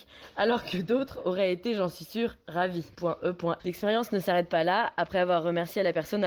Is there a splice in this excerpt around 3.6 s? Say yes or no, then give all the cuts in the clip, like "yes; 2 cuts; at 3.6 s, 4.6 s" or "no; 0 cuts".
yes; 1 cut; at 3.6 s